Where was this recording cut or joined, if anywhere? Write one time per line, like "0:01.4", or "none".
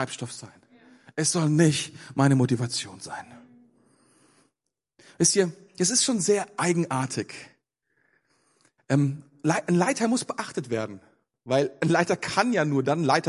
0:08.8